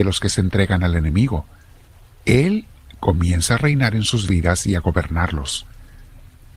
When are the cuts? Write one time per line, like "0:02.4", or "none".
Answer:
none